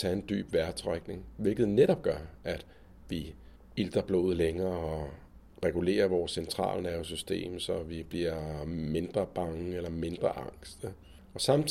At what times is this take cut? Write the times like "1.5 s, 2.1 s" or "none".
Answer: none